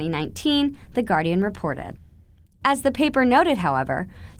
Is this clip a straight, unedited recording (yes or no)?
yes